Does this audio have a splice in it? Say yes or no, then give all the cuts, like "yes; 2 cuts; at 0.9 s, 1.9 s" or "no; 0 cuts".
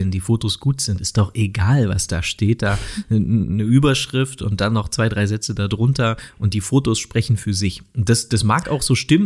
no; 0 cuts